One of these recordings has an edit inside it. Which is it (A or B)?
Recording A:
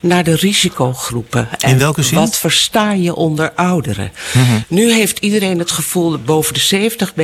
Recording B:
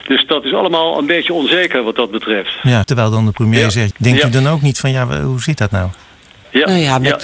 B